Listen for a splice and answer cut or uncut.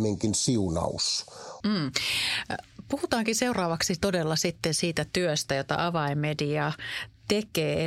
cut